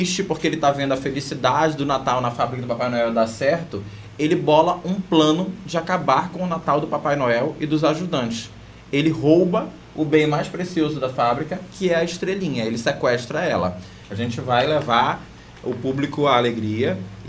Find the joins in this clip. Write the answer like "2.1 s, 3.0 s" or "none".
14.1 s